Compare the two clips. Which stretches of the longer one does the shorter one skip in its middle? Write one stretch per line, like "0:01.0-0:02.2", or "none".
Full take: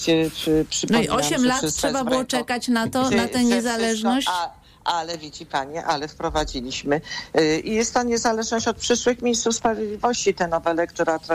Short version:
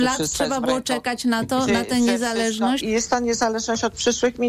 0:04.2-0:07.6